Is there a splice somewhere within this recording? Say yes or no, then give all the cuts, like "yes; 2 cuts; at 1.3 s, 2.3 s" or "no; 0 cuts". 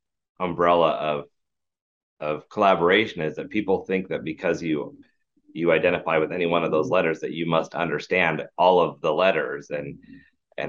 no; 0 cuts